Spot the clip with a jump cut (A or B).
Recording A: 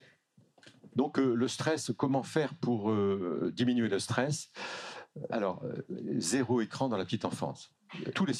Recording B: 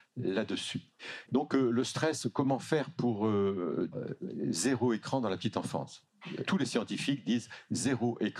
B